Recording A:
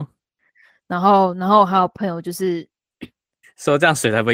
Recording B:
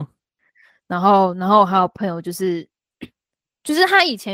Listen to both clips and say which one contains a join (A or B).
A